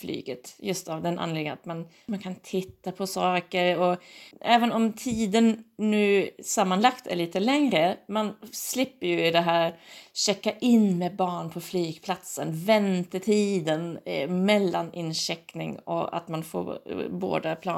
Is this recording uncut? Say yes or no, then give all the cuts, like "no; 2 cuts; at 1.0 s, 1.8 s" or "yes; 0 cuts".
no; 2 cuts; at 2.1 s, 4.3 s